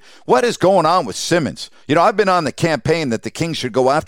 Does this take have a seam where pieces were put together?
no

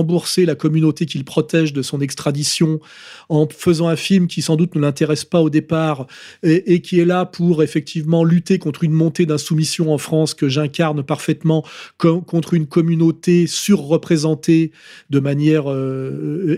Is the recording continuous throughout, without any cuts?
yes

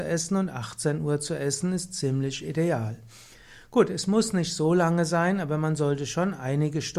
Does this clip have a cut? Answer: no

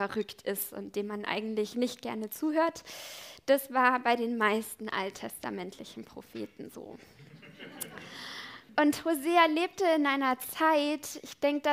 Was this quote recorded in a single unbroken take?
no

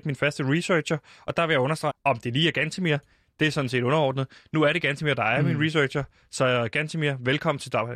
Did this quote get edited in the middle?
yes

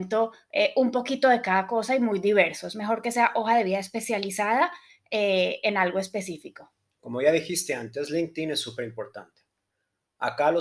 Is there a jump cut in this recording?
no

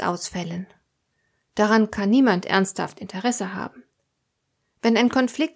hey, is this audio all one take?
yes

